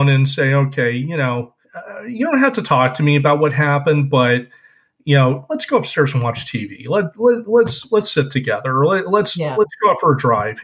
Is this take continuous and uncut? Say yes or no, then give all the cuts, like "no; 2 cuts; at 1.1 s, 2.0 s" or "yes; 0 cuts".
no; 1 cut; at 1.6 s